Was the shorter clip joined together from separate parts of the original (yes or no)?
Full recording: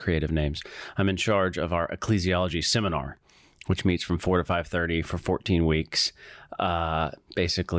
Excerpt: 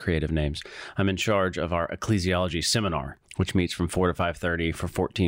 yes